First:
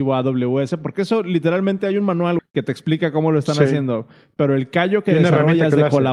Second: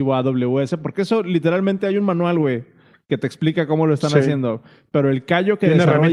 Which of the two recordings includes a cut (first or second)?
first